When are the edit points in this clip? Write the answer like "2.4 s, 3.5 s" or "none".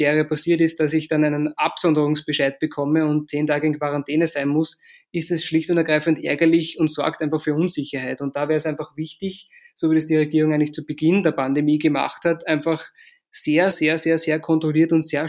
13.7 s